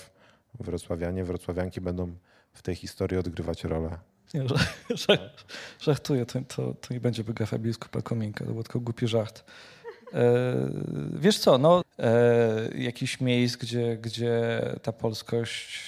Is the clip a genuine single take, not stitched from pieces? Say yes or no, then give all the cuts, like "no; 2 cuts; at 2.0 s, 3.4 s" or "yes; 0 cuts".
no; 2 cuts; at 4.3 s, 11.8 s